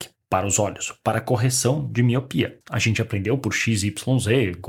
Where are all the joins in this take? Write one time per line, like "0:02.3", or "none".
0:02.6